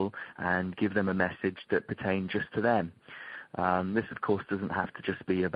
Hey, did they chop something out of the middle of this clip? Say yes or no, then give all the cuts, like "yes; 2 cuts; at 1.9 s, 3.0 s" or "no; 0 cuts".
no; 0 cuts